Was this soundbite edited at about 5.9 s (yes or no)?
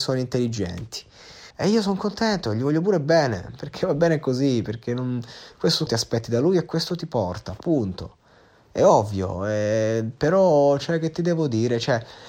yes